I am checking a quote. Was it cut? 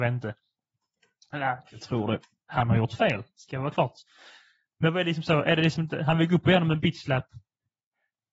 yes; 1 cut; at 2.4 s

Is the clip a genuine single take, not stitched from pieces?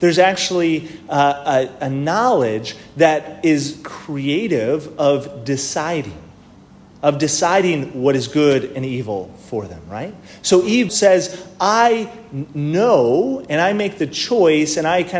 no; 1 cut; at 10.9 s

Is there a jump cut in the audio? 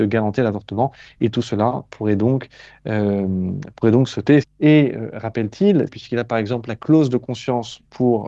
yes; 2 cuts; at 4.4 s, 5.9 s

